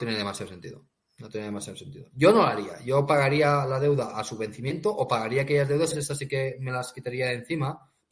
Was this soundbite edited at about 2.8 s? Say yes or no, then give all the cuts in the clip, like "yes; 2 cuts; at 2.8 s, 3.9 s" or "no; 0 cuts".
no; 1 cut; at 5.9 s